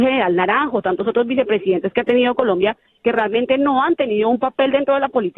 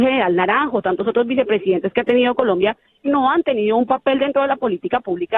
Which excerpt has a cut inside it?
second; 1 cut; at 3.0 s

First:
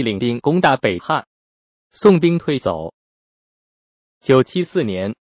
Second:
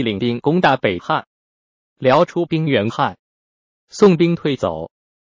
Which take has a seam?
first; 1 cut; at 1.8 s

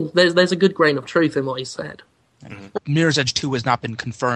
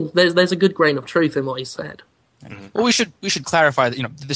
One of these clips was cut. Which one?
first; 1 cut; at 2.8 s

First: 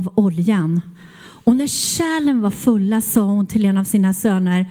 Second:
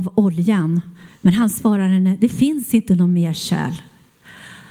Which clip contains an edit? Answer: second; 1 cut; at 1.1 s

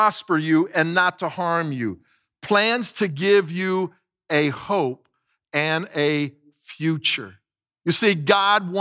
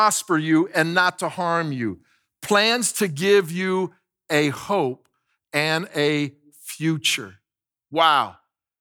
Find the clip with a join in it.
first; 1 cut; at 7.8 s

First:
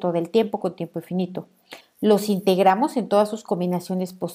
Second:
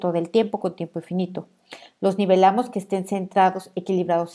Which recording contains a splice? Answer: first; 1 cut; at 1.8 s

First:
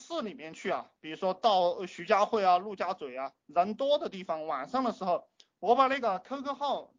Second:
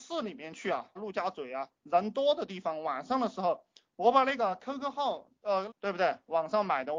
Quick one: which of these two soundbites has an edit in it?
second; 2 cuts; at 1.0 s, 5.7 s

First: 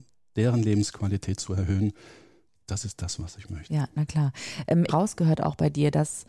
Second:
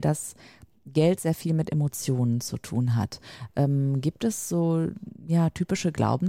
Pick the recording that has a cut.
first; 1 cut; at 4.9 s

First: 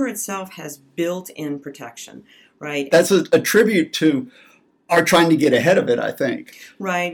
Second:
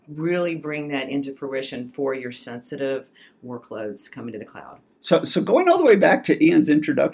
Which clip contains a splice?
first; 1 cut; at 2.9 s

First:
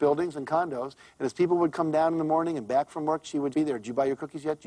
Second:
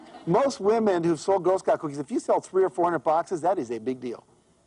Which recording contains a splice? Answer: first; 1 cut; at 3.5 s

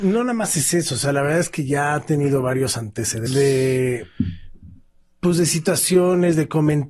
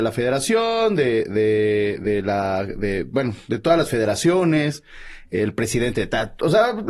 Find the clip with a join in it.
first; 1 cut; at 3.3 s

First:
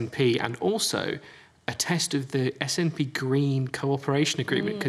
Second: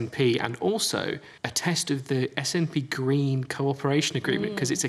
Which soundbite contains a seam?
second; 1 cut; at 1.4 s

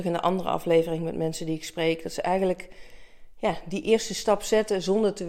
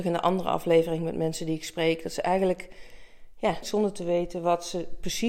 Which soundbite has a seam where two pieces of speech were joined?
second; 1 cut; at 3.6 s

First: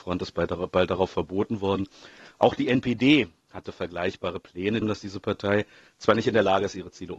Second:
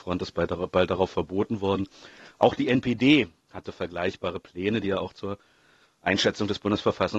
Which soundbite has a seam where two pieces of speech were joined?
first; 1 cut; at 4.8 s

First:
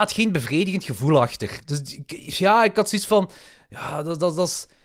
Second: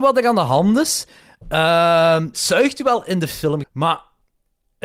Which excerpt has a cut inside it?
second; 2 cuts; at 2.3 s, 3.6 s

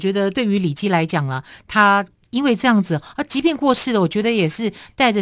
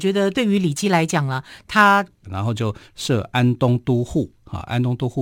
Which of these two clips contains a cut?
second; 1 cut; at 2.2 s

